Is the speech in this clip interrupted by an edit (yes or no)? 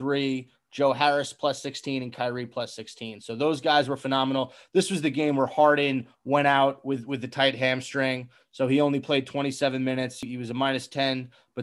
no